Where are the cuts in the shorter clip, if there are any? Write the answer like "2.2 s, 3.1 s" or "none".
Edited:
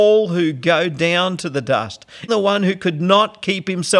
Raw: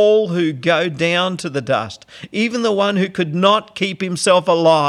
2.3 s

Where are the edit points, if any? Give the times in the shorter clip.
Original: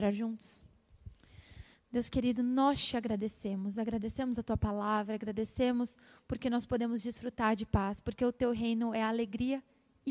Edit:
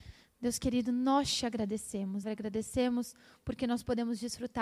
2.2 s

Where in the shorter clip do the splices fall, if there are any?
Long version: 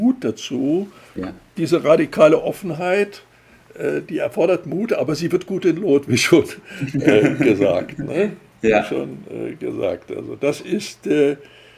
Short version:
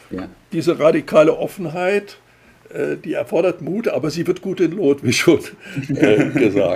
none

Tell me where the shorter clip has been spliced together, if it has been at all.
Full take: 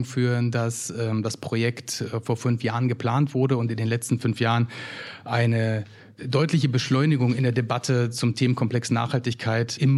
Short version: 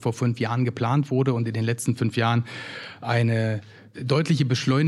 none

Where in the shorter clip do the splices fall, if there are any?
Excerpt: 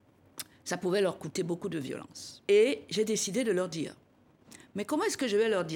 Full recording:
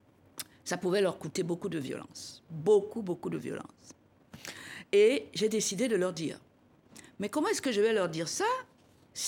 2.4 s

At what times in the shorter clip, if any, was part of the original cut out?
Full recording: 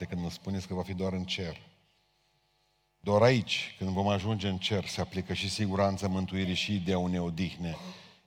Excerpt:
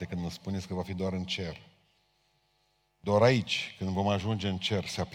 none

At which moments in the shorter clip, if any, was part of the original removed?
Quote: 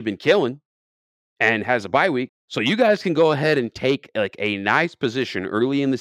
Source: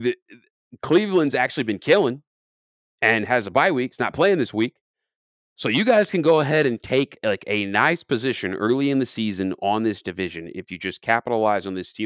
2.3 s

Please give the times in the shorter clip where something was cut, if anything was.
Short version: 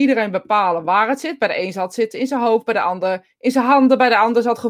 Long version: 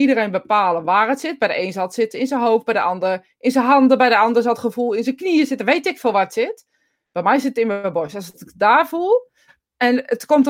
none

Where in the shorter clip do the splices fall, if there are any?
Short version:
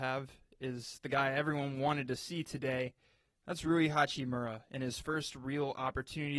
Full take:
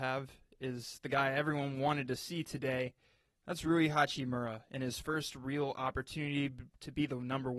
none

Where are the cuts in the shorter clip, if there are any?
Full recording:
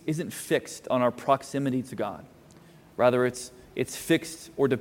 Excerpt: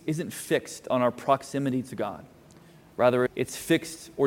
3.3 s

